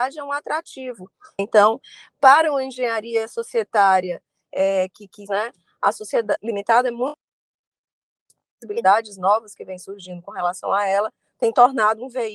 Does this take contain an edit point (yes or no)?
yes